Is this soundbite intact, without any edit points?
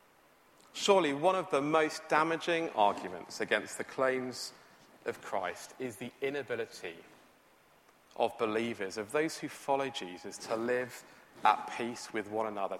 yes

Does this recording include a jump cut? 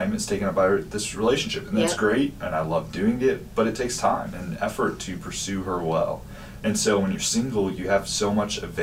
no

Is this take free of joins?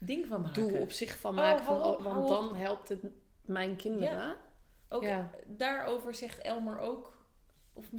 no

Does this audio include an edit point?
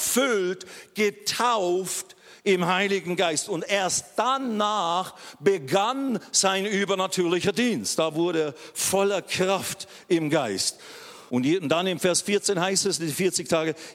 yes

